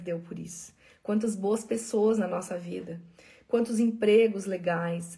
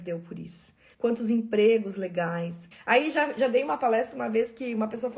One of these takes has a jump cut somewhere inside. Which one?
second; 2 cuts; at 0.9 s, 2.7 s

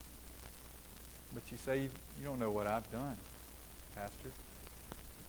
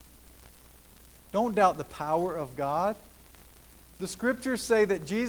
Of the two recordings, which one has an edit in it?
second; 1 cut; at 1.2 s

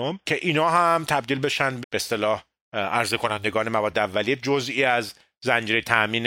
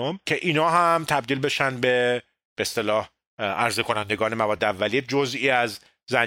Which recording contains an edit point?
first; 1 cut; at 1.8 s

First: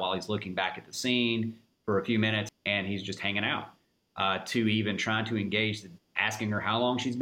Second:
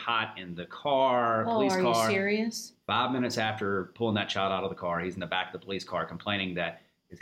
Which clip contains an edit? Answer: first; 2 cuts; at 2.5 s, 6.0 s

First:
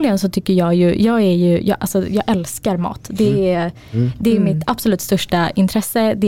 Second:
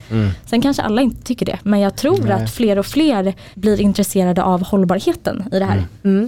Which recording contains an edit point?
second; 1 cut; at 3.5 s

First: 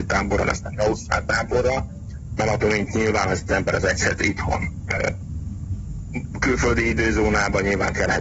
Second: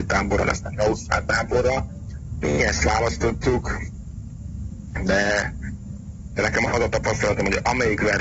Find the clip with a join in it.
first; 1 cut; at 2.4 s

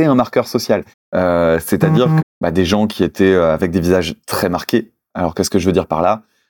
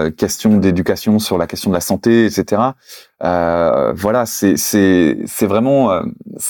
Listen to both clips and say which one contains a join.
first; 2 cuts; at 0.9 s, 2.2 s

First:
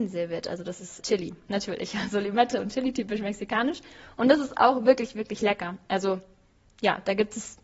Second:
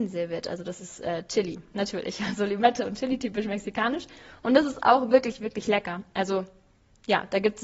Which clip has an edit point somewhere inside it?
first; 1 cut; at 1.0 s

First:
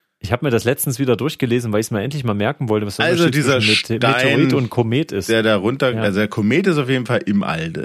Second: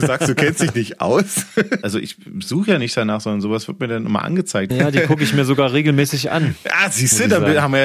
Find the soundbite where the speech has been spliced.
second; 2 cuts; at 1.8 s, 4.7 s

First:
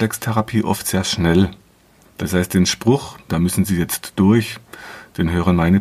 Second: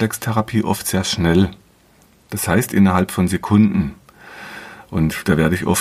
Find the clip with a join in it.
first; 2 cuts; at 2.0 s, 3.3 s

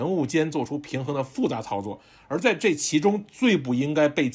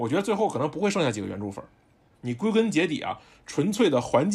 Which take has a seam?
second; 1 cut; at 2.1 s

